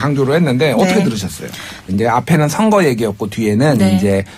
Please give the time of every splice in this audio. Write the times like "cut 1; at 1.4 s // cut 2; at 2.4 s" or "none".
cut 1; at 1.9 s